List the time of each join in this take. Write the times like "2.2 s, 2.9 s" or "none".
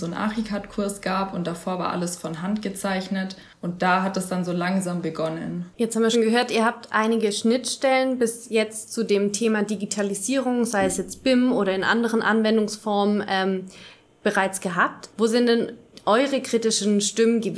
6.1 s, 15.1 s